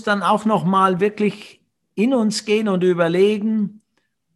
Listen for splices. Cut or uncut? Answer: uncut